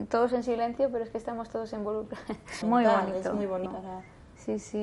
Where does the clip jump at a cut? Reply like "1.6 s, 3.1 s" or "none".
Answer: 2.6 s, 3.7 s